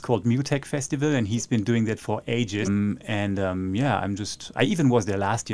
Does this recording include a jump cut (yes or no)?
yes